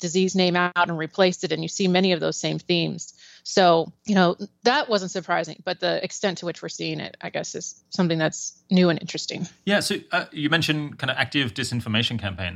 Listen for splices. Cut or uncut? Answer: uncut